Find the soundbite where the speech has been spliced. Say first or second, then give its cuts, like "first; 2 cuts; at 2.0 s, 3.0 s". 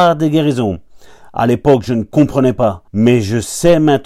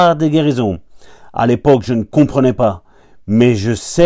first; 1 cut; at 2.9 s